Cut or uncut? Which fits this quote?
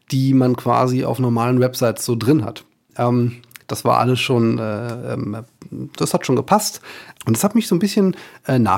cut